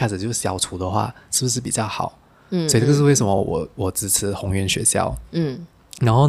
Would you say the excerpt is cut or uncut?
uncut